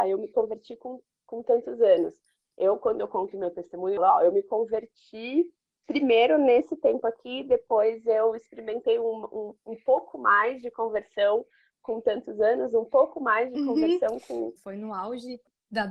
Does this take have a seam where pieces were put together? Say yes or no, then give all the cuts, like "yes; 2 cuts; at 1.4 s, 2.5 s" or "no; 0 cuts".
yes; 2 cuts; at 4.0 s, 14.6 s